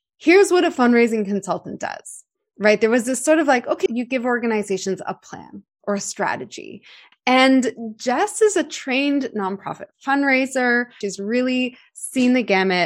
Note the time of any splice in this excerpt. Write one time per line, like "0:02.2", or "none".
0:03.9
0:07.1
0:11.0